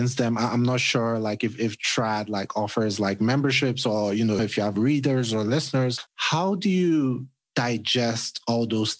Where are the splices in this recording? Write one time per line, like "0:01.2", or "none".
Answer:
0:04.4
0:06.1